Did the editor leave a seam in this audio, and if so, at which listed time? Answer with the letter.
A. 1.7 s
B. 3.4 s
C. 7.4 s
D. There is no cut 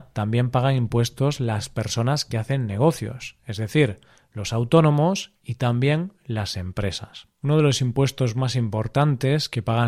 C